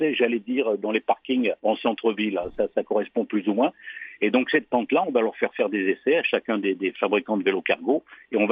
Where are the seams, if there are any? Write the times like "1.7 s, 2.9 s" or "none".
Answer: 1.6 s